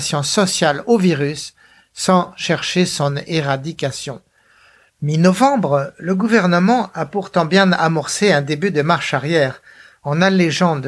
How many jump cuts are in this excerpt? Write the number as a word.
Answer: one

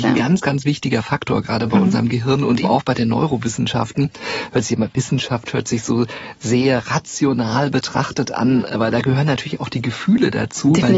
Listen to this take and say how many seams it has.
one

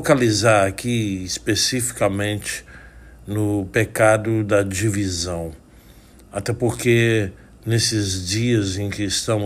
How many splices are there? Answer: zero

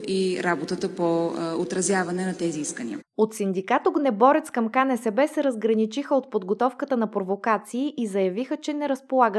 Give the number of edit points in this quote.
zero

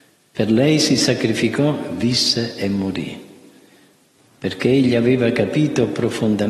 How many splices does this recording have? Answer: one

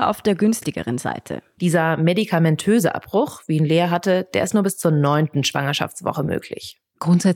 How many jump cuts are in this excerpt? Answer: one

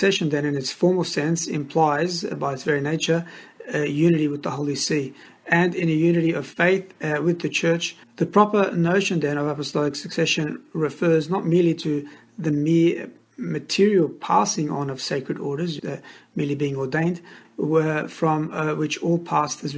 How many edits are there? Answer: three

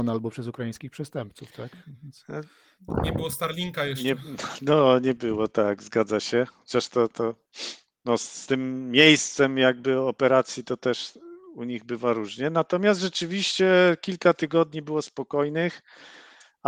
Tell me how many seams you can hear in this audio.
zero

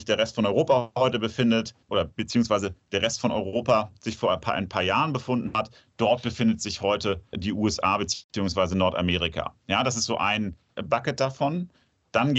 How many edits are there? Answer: one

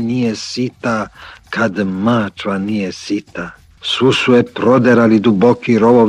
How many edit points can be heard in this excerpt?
one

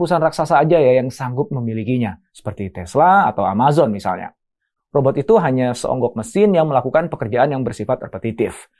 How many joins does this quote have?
one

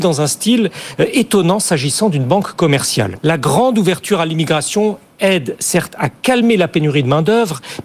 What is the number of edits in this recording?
one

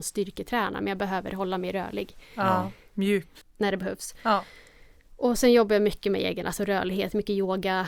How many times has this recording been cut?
one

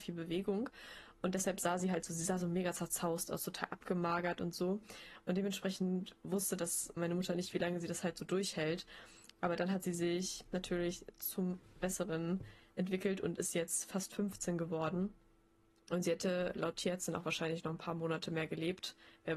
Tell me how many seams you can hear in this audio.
one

